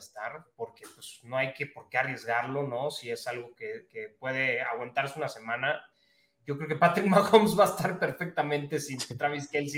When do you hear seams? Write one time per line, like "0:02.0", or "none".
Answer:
none